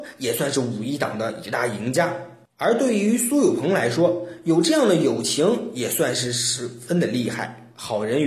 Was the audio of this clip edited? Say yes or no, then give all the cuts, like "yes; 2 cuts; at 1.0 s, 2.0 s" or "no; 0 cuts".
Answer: no; 0 cuts